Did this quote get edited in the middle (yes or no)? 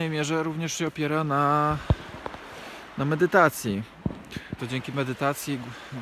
yes